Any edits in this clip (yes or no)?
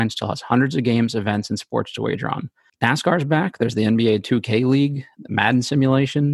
no